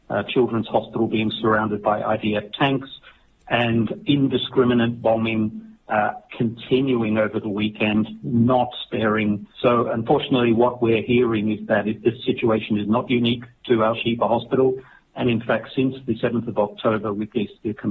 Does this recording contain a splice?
yes; 1 cut; at 9.5 s

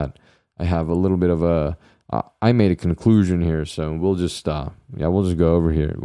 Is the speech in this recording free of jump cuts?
yes; 0 cuts

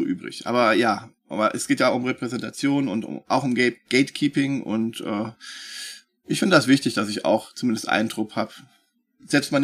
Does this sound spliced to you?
no; 0 cuts

